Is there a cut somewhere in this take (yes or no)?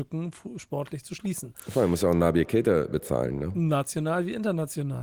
no